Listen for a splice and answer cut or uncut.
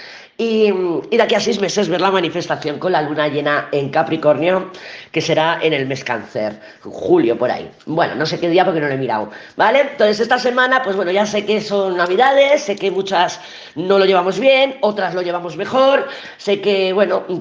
uncut